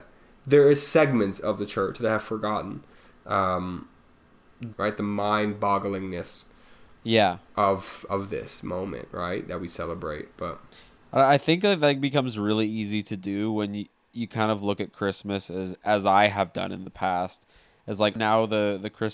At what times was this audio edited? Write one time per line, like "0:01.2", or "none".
0:04.7